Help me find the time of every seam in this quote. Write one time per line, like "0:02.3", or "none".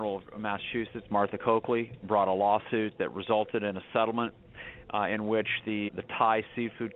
0:05.9